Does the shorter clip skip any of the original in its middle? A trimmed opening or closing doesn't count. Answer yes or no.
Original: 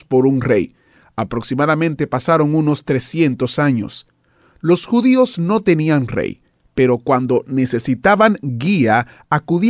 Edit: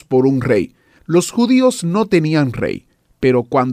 yes